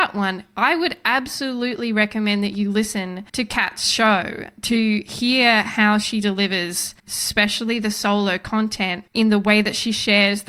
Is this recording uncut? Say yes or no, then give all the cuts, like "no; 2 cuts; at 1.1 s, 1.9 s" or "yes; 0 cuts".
no; 3 cuts; at 3.3 s, 7.0 s, 9.1 s